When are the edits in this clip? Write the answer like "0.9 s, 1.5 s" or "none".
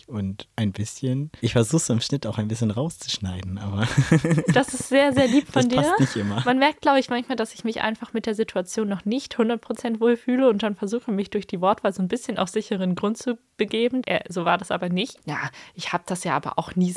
14.0 s, 15.2 s